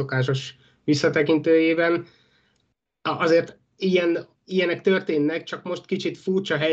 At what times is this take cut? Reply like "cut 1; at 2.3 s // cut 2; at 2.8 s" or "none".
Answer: cut 1; at 4.4 s